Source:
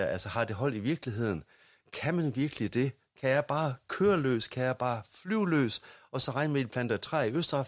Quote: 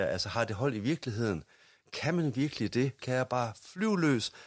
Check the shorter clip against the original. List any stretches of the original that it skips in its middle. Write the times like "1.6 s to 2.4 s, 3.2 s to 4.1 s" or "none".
3.0 s to 4.5 s